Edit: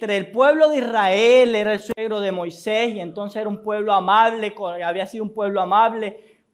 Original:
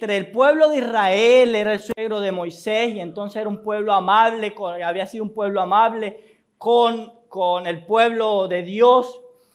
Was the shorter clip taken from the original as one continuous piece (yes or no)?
yes